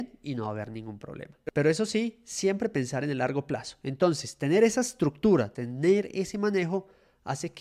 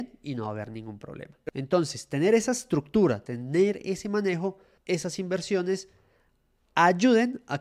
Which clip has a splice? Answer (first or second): second